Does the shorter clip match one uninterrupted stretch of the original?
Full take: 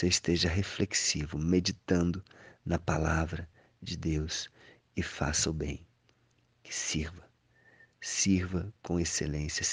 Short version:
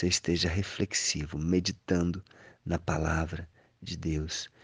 yes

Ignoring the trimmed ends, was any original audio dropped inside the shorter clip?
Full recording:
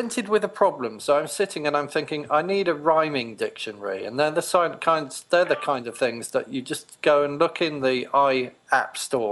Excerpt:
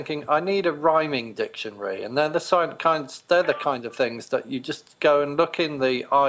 no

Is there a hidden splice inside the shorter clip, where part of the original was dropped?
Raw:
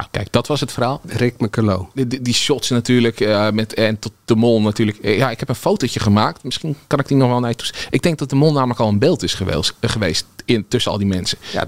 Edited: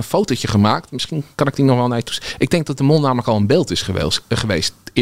no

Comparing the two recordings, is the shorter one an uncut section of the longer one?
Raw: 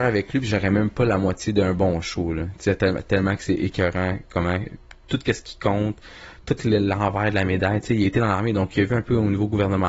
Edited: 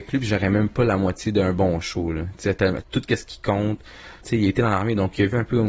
no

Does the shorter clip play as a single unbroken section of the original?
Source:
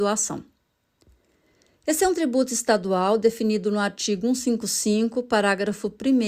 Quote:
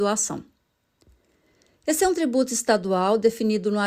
yes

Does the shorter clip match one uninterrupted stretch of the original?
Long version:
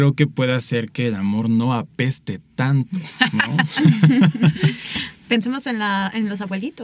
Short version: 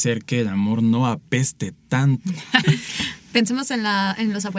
no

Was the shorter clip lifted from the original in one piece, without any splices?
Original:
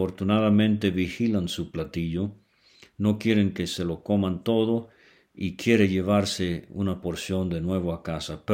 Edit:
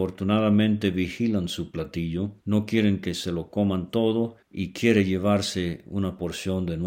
no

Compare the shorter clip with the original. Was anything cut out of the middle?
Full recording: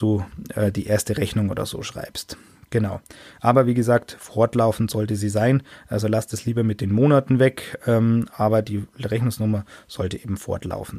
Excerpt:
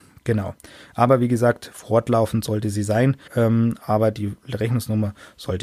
yes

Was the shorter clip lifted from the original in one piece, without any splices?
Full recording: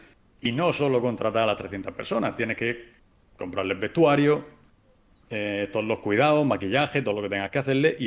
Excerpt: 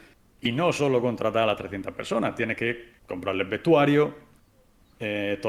no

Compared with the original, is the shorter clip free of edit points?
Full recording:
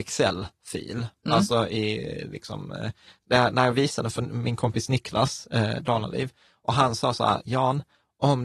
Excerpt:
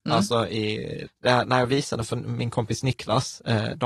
no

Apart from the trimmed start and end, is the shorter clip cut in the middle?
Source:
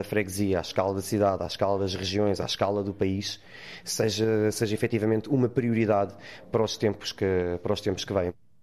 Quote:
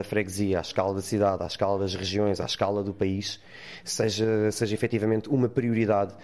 no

